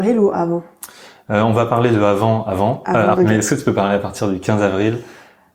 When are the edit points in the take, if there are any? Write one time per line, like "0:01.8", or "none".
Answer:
0:03.1